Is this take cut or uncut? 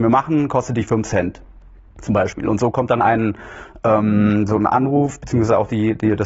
uncut